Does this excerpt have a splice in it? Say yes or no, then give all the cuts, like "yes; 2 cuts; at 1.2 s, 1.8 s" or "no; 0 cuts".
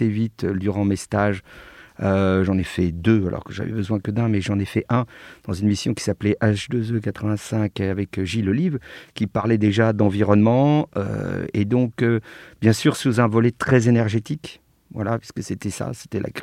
no; 0 cuts